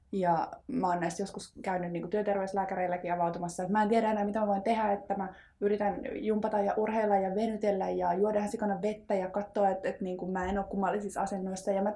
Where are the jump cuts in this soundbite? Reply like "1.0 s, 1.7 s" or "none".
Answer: none